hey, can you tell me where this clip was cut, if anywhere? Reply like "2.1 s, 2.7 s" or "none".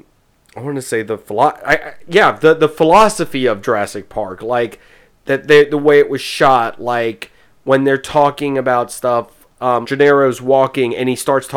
9.8 s

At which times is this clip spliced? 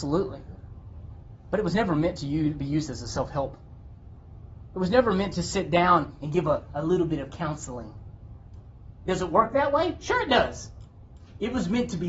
none

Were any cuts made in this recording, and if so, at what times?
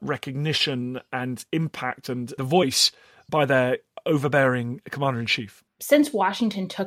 5.7 s

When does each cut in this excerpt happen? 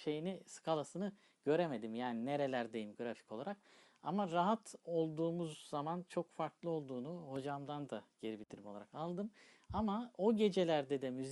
none

